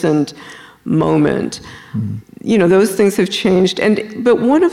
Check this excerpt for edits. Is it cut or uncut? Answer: uncut